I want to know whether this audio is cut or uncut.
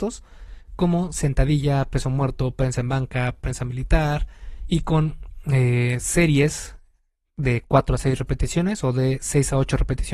uncut